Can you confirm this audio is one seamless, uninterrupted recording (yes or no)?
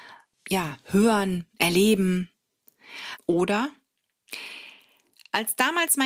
no